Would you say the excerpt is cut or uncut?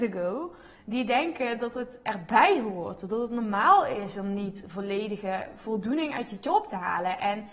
uncut